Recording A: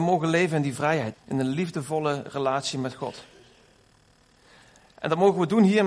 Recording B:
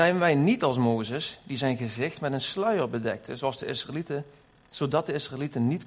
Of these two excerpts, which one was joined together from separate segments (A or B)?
A